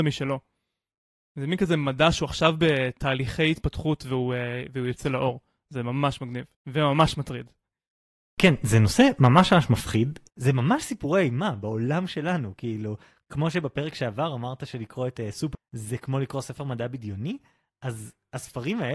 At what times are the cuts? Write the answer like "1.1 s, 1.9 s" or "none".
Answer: 6.5 s, 10.3 s, 15.5 s